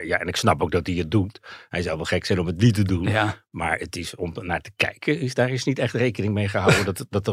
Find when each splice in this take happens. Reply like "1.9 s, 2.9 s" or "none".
none